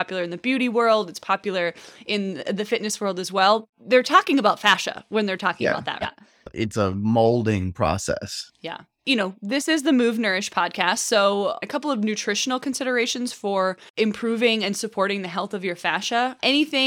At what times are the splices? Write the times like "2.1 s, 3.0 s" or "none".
6.0 s